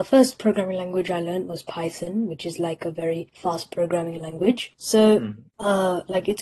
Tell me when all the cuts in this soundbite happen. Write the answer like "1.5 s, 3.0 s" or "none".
none